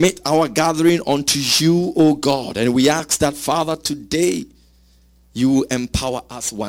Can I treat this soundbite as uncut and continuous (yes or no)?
yes